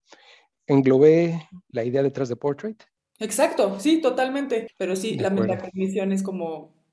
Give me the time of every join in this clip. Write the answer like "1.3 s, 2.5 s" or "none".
1.7 s, 4.7 s